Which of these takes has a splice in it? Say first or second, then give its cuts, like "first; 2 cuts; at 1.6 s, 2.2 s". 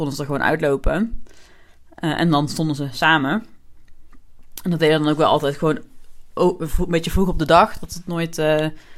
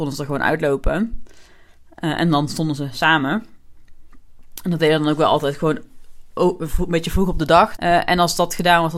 second; 1 cut; at 7.8 s